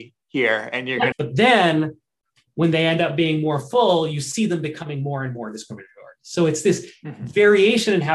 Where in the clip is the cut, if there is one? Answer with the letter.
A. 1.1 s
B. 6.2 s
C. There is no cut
A